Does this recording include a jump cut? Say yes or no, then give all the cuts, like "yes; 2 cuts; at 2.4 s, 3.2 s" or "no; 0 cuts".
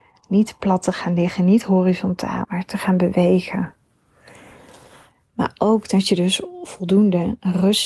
yes; 1 cut; at 2.4 s